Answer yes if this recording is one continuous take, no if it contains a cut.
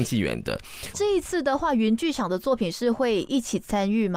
no